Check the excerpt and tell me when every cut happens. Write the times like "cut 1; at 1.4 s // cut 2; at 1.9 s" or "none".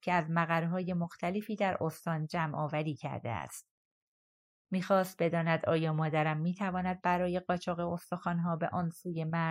none